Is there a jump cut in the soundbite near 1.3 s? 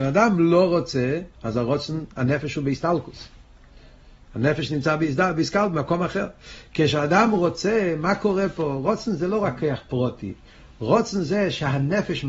no; 0 cuts

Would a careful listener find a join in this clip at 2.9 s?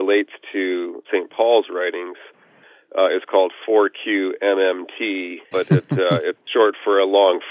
no; 2 cuts; at 1.0 s, 5.5 s

